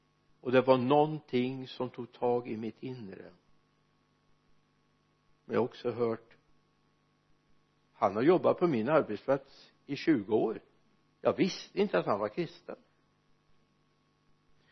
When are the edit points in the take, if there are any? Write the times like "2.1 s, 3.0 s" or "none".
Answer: none